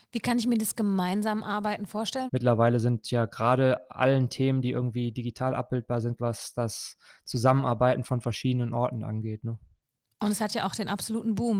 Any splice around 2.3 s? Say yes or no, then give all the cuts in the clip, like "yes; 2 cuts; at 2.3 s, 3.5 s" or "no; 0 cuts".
yes; 2 cuts; at 2.3 s, 6.2 s